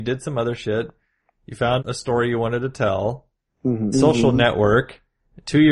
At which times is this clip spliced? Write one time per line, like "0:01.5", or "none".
0:01.8
0:03.9